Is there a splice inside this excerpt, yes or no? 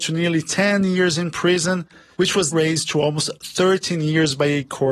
yes